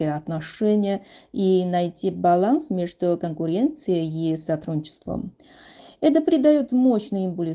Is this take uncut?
yes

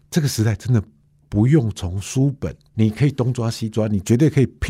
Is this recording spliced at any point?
yes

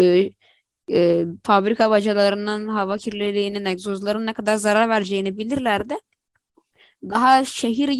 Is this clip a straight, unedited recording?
yes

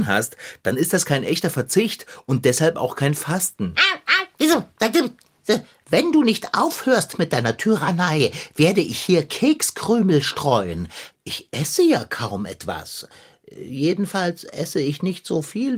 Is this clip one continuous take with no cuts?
no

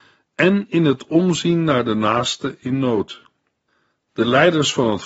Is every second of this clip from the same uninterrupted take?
no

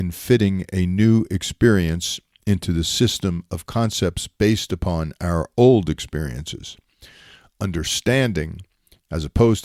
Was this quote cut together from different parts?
no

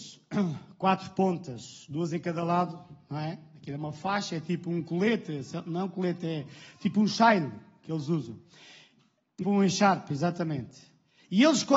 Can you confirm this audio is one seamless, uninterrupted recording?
no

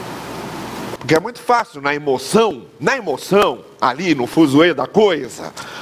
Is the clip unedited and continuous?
no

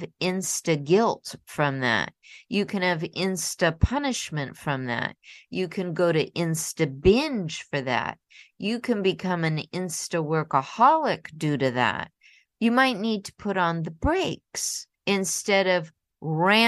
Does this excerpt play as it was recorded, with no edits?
no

